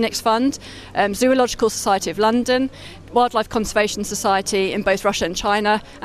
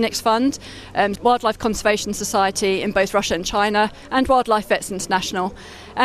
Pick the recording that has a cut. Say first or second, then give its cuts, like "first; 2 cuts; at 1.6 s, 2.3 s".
second; 1 cut; at 1.2 s